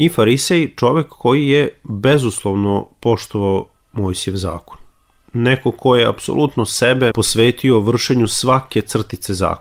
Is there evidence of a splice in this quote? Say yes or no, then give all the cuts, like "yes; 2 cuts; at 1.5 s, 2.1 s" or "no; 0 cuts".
yes; 1 cut; at 7.1 s